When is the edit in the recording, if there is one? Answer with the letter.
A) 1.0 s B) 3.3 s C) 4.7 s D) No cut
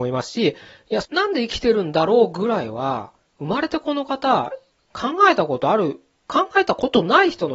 A